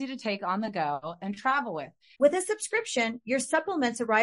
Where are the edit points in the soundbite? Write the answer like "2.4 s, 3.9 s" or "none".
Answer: 2.1 s